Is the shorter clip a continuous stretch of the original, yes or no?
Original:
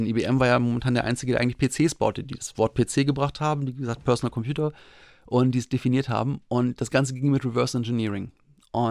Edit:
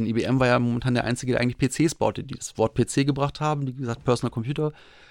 yes